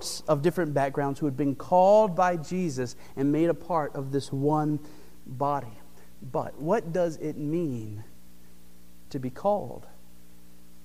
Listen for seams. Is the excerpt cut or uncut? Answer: uncut